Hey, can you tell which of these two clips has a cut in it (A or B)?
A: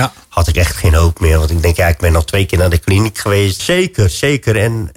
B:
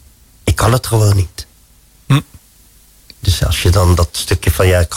A